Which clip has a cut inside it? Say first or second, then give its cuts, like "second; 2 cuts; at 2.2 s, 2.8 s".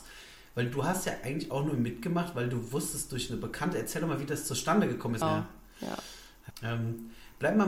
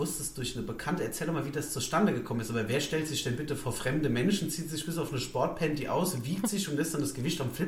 first; 2 cuts; at 5.2 s, 6.5 s